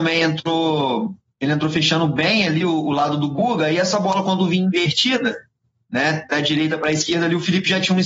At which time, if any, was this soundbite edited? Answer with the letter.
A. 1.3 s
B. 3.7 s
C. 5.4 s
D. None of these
D